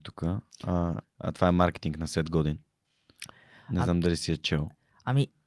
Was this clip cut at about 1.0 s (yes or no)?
yes